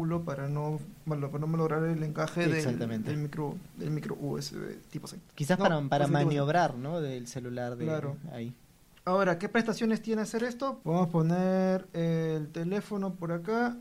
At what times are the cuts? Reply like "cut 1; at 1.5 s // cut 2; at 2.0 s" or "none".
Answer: cut 1; at 10.8 s